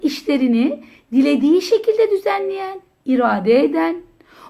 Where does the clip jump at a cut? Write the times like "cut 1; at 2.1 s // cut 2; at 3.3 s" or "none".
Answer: none